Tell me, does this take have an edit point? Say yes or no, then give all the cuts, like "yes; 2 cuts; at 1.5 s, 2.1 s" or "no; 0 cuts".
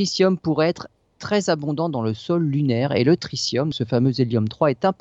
yes; 1 cut; at 3.7 s